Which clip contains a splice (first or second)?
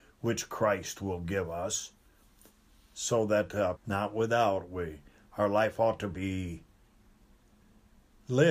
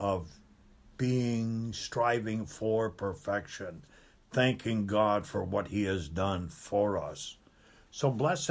first